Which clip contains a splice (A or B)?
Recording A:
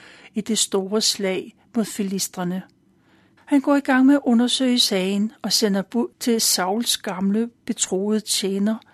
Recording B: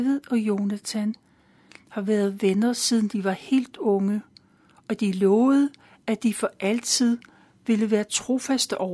A